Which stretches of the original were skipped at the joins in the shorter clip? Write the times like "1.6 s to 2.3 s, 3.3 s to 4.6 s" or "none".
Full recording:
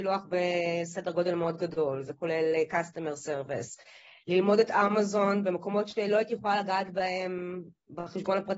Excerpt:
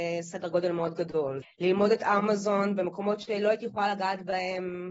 2.0 s to 4.1 s